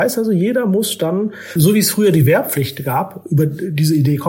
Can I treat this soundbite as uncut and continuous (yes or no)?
yes